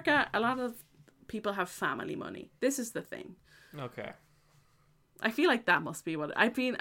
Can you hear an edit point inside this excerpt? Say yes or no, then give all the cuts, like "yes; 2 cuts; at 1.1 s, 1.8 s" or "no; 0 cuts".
no; 0 cuts